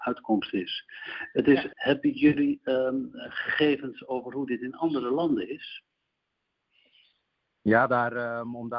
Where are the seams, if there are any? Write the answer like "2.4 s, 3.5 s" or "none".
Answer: 1.7 s

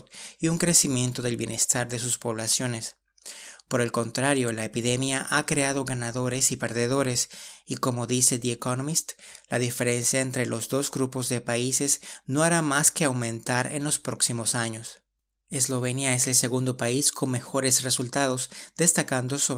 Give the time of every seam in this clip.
none

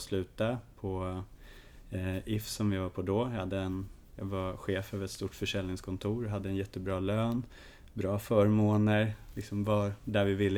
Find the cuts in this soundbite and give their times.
none

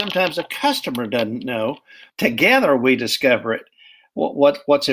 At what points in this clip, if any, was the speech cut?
2.1 s

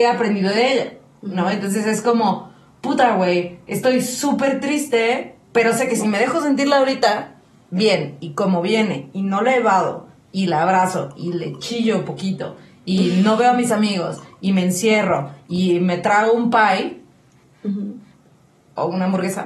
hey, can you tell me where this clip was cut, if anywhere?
5.4 s

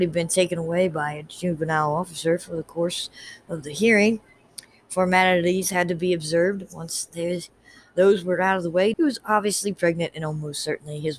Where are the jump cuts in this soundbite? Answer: 8.9 s

